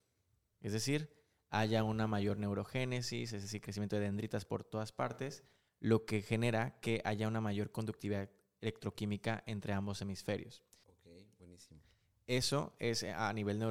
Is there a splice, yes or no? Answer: yes